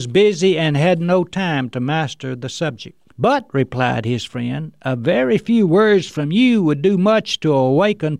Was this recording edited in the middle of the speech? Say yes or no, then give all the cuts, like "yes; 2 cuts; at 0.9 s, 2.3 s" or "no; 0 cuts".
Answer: yes; 1 cut; at 3.1 s